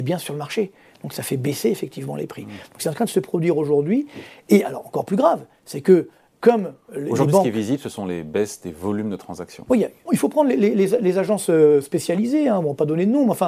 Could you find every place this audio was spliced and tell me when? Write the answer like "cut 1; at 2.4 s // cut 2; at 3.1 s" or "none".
cut 1; at 10.1 s

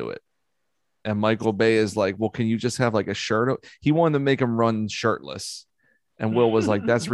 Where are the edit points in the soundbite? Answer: none

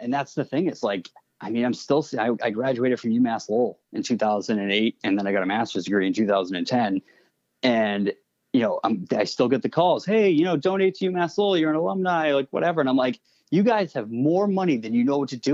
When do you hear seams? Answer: none

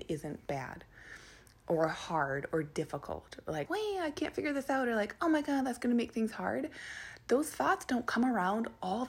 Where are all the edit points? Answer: cut 1; at 3.7 s

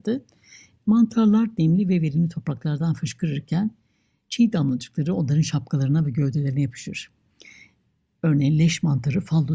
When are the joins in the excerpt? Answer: none

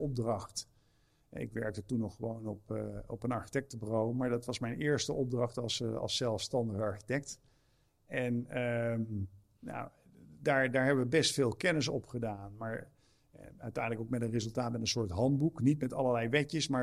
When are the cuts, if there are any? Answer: none

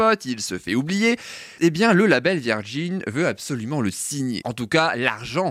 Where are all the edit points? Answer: cut 1; at 1.6 s // cut 2; at 4.4 s

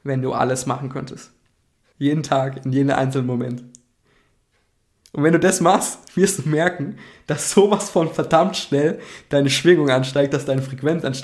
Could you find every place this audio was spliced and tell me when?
cut 1; at 1.9 s

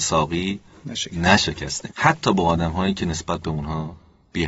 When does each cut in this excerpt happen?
cut 1; at 1.9 s

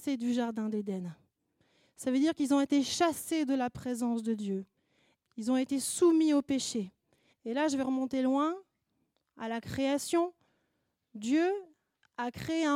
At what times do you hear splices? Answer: cut 1; at 5.2 s // cut 2; at 7.3 s

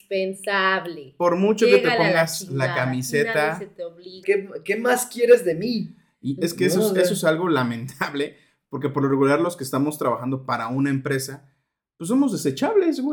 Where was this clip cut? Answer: cut 1; at 4.2 s

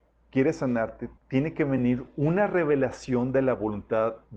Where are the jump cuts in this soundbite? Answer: cut 1; at 1.2 s

